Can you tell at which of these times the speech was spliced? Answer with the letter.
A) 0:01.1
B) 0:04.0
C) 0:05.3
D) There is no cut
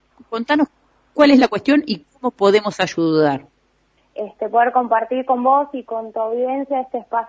B